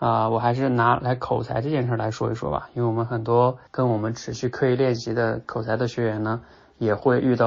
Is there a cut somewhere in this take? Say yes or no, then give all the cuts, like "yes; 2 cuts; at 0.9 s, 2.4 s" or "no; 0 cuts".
yes; 1 cut; at 3.7 s